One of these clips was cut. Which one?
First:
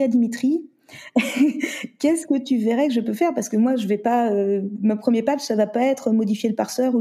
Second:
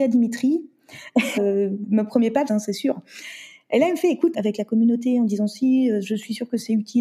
second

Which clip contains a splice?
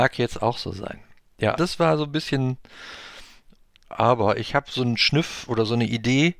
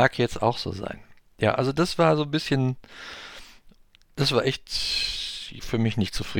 first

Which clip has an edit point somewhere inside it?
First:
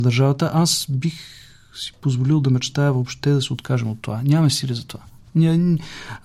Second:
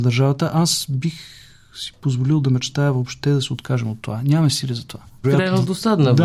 second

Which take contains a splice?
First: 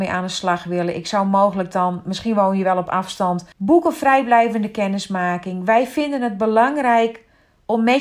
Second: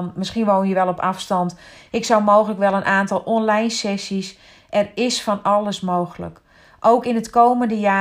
first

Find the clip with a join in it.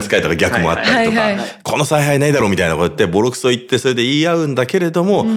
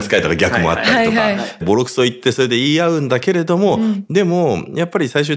second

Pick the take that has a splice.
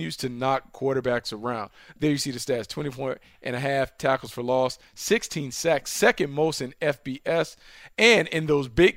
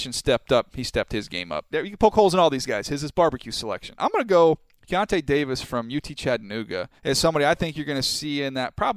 second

